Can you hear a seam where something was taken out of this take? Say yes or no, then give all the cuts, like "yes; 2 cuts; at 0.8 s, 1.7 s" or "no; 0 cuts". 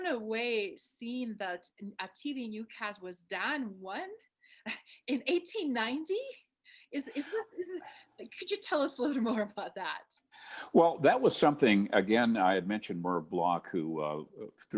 no; 0 cuts